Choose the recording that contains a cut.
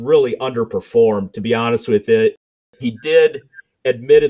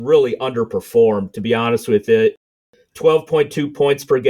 first; 1 cut; at 2.8 s

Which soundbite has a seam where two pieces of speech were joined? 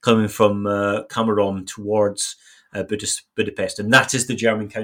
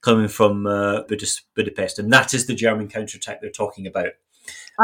second; 1 cut; at 1.1 s

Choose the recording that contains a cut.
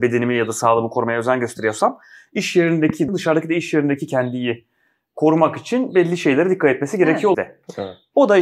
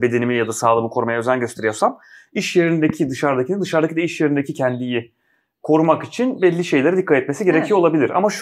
first; 2 cuts; at 3.1 s, 7.3 s

